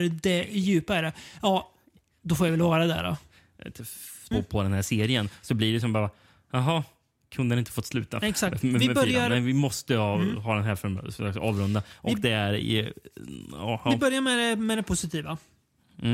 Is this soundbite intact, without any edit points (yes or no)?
no